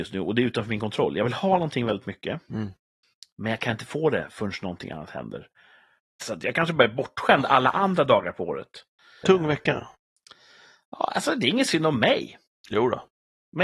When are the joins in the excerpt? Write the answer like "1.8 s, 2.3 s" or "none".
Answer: 6.1 s, 9.2 s

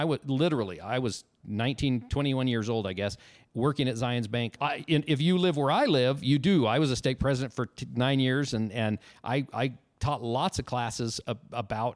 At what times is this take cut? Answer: 4.6 s

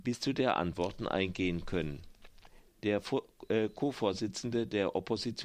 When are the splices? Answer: 2.7 s

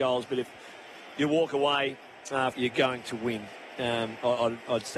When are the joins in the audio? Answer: 2.5 s

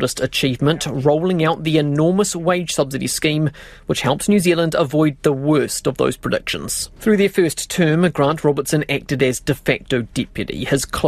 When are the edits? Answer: 7.0 s

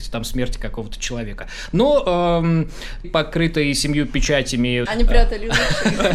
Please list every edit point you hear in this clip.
3.0 s, 4.9 s

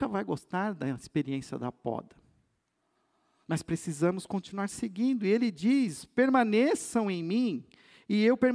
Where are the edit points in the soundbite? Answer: none

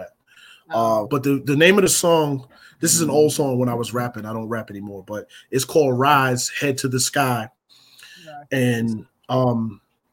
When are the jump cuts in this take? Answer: 1.1 s

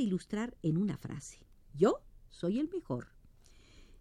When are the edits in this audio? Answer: 1.7 s

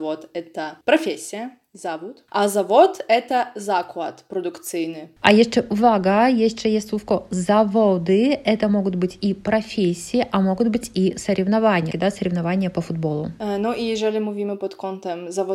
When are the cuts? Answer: 11.9 s

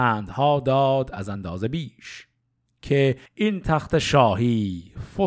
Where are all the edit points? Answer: 3.3 s

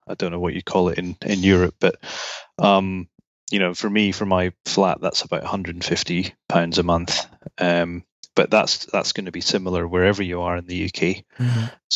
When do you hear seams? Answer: none

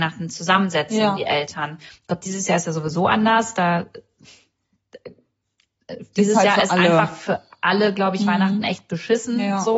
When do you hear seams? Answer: none

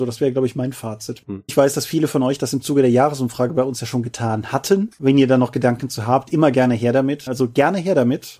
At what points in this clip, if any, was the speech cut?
1.5 s, 5.0 s, 7.3 s

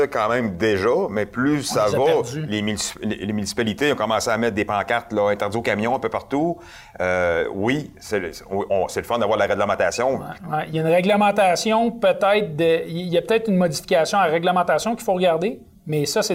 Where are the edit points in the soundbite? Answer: 10.4 s

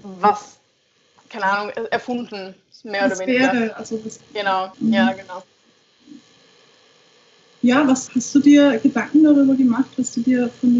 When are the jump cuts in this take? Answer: 4.7 s, 8.1 s

